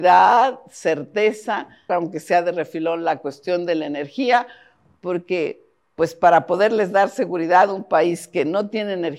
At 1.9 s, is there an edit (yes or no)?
yes